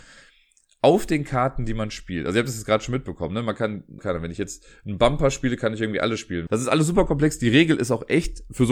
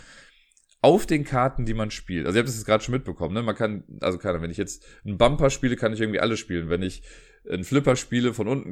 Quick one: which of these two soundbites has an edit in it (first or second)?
first